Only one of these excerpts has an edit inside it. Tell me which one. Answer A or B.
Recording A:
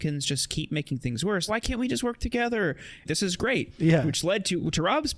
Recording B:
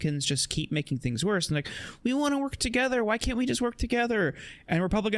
A